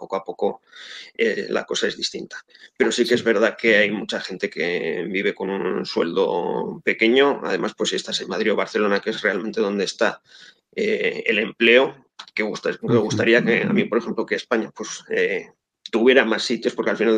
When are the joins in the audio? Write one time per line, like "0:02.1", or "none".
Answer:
none